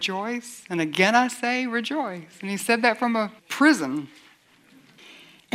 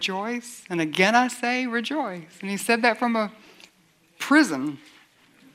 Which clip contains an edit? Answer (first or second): first